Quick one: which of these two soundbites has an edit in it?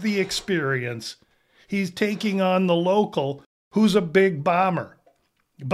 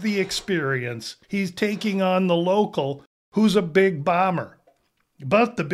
second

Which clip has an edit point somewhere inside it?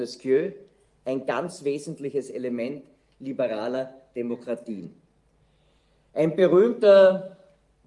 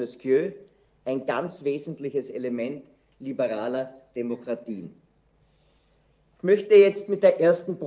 first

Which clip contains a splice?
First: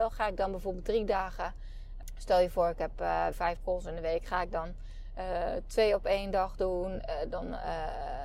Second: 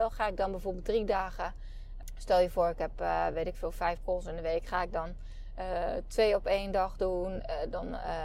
first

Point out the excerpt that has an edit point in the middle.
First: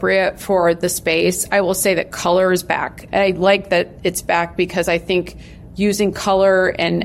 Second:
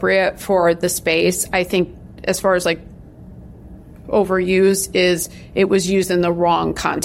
first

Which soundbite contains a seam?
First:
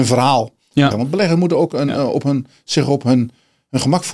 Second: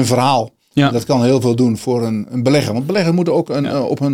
first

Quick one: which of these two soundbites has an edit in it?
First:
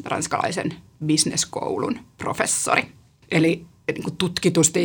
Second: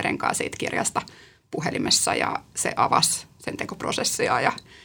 first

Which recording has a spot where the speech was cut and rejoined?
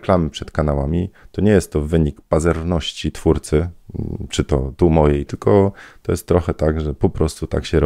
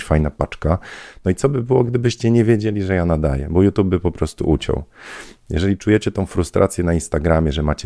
first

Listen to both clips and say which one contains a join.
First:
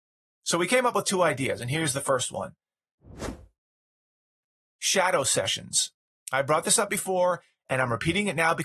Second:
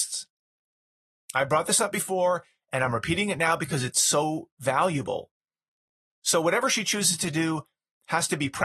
second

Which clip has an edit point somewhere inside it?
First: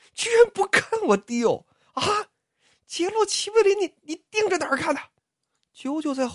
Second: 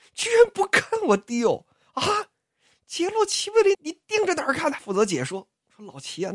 second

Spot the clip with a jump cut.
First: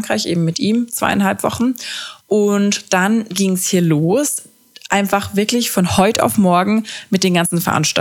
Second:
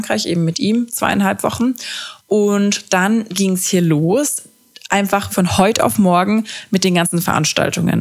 second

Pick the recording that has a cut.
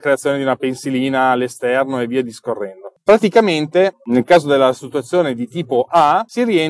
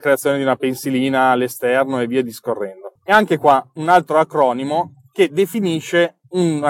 second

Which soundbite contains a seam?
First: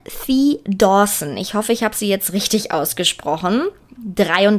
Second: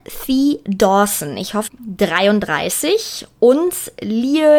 second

